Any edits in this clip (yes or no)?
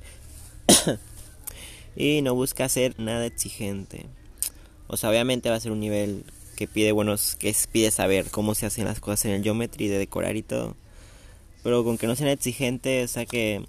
yes